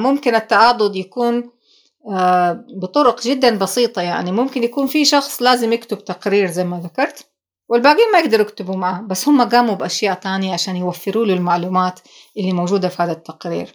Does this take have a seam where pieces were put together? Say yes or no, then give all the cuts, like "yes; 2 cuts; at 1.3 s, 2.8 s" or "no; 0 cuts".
no; 0 cuts